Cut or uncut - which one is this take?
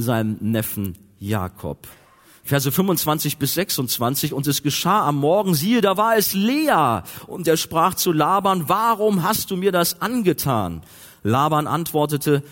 uncut